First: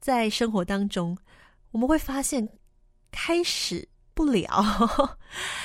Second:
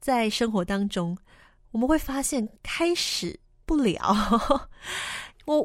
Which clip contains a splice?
second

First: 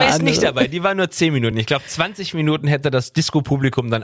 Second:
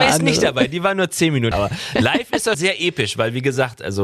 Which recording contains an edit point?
second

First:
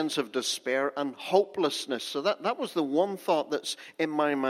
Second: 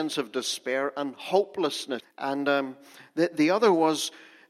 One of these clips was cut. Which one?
second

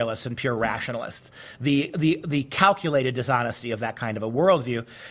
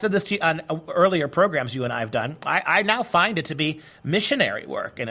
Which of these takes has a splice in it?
first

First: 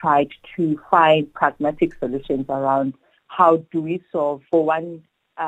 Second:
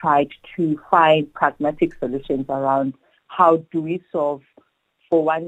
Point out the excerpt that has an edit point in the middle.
first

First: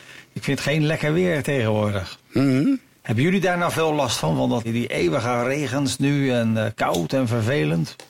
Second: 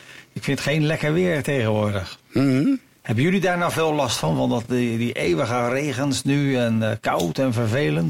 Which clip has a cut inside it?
first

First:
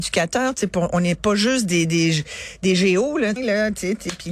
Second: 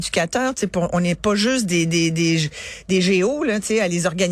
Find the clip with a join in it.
first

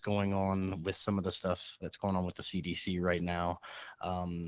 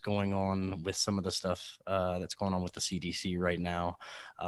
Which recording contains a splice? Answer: first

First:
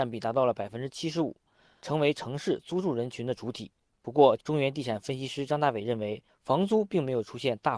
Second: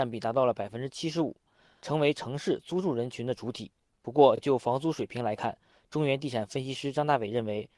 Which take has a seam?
first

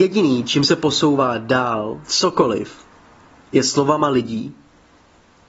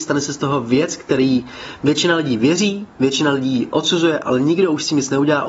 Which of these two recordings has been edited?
first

